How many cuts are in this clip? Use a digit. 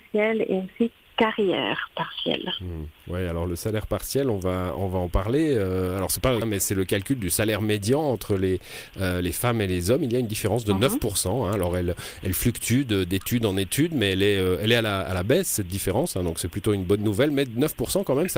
2